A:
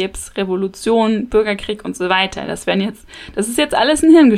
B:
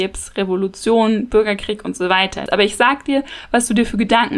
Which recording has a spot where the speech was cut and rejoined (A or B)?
B